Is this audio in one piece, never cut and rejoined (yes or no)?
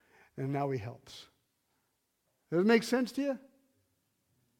yes